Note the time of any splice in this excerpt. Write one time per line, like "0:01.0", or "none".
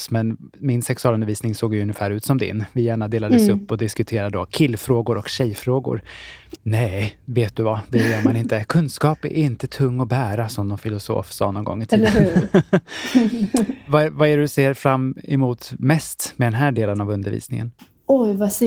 0:06.6